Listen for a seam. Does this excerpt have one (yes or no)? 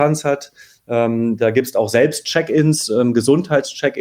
no